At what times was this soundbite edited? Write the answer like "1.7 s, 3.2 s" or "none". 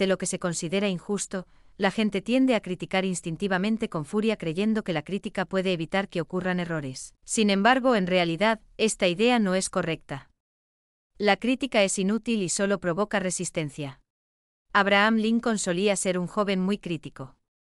7.2 s, 14.6 s